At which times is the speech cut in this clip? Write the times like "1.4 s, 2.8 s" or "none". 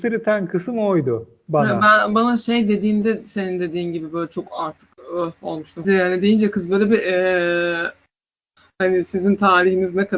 5.8 s